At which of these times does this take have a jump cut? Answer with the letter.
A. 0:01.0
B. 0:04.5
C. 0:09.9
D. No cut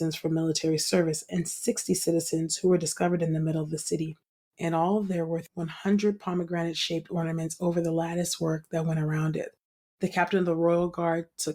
B